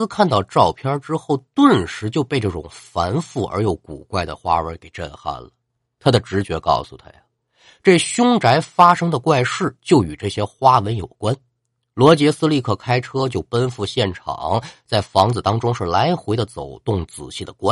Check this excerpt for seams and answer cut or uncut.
uncut